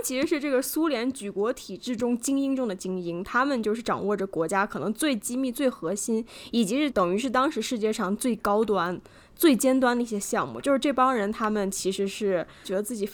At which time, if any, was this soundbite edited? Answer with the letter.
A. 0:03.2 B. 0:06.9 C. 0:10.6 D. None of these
B